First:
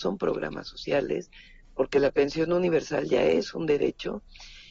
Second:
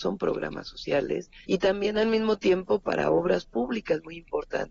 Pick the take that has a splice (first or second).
second